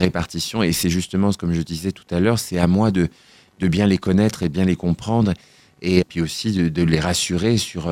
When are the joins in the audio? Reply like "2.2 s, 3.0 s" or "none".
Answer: 6.0 s